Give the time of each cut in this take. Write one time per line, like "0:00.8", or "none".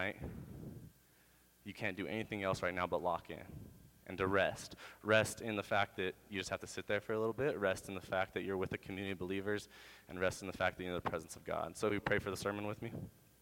0:11.9